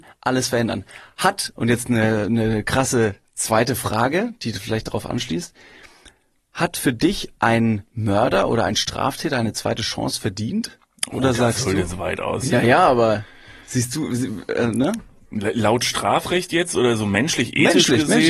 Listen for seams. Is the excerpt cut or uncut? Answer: uncut